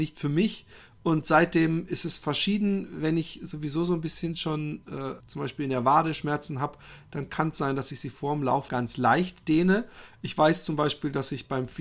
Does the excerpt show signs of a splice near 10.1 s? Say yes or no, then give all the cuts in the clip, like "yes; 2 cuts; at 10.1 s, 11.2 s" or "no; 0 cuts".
no; 2 cuts; at 5.2 s, 8.7 s